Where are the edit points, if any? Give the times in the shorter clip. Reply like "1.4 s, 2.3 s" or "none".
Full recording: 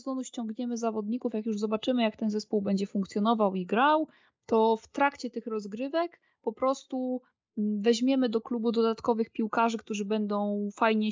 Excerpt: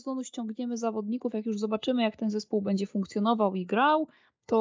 none